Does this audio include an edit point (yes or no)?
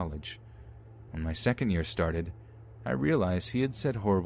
no